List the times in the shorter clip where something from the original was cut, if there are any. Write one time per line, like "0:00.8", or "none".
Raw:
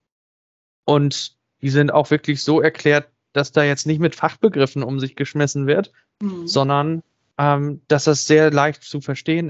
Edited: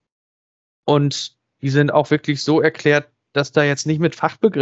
none

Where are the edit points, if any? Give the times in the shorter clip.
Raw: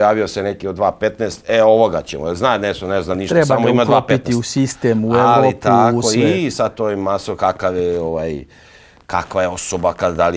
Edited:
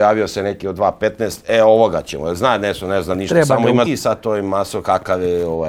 0:03.9

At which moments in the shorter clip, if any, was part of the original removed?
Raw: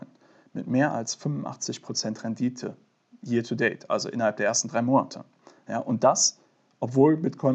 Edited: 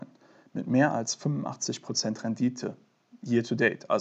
none

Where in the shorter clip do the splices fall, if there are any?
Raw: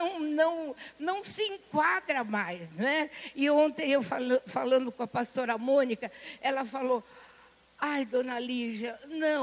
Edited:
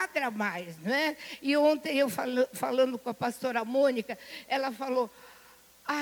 none

